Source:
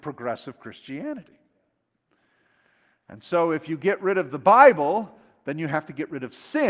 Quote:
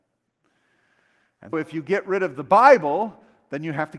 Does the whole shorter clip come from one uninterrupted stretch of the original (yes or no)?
no